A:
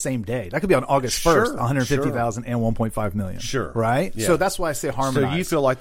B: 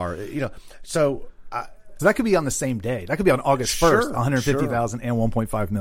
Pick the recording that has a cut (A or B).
B